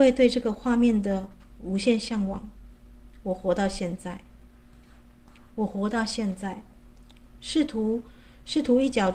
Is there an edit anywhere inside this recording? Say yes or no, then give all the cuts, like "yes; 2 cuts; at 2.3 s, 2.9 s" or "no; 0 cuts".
no; 0 cuts